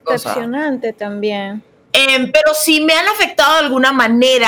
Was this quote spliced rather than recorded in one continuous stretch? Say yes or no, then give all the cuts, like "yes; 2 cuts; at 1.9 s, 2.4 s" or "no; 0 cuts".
yes; 1 cut; at 1.9 s